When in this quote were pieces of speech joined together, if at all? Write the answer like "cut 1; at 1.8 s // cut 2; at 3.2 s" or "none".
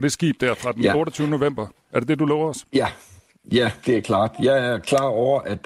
cut 1; at 3.8 s